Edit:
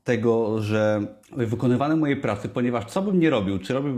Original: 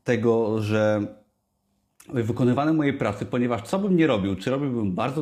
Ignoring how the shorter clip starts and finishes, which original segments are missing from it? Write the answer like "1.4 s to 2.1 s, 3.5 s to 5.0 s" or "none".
1.2 s to 2.0 s